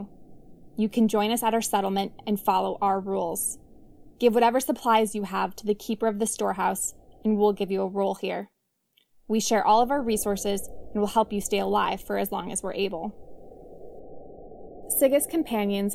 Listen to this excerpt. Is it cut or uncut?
uncut